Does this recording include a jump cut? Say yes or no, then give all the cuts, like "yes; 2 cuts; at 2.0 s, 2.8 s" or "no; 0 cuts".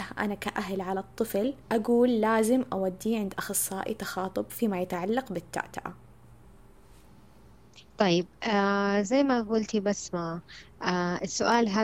yes; 2 cuts; at 1.6 s, 7.9 s